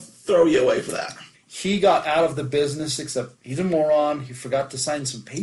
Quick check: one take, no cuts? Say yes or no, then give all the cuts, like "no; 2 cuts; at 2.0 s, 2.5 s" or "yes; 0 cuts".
no; 2 cuts; at 1.3 s, 3.3 s